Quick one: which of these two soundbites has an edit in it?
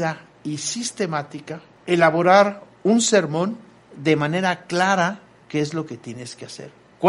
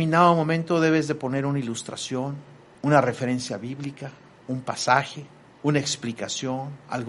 first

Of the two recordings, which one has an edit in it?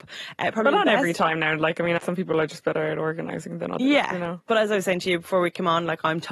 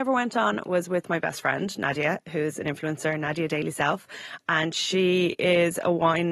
first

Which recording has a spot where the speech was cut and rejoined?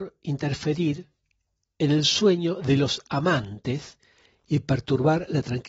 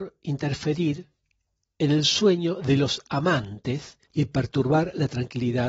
second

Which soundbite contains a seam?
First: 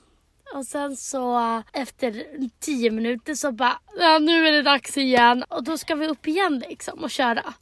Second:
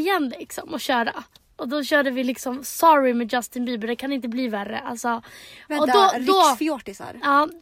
first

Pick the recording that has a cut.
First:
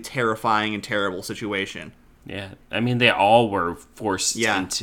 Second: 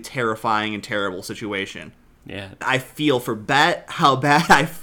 second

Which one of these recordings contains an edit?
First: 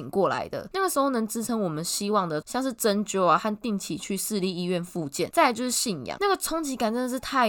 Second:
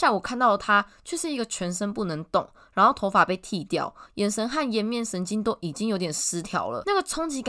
first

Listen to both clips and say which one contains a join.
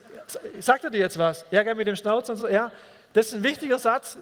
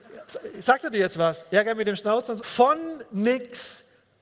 second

